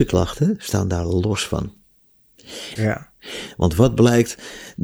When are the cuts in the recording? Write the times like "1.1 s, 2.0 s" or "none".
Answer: 2.8 s